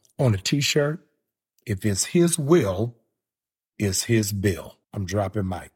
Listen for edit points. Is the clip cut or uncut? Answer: cut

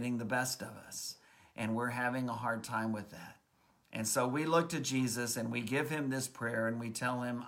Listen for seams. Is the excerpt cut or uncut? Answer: uncut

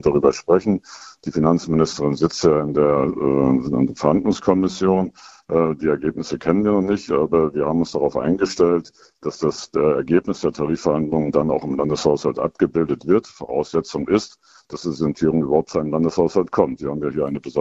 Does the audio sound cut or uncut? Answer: uncut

